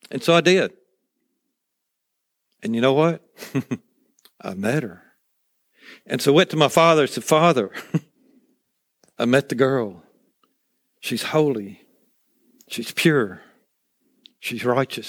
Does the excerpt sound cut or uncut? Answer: uncut